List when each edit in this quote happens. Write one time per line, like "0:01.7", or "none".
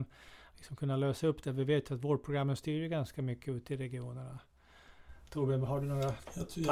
none